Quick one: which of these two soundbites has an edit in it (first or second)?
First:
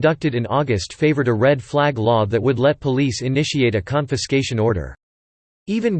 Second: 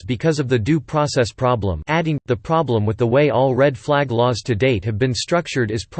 second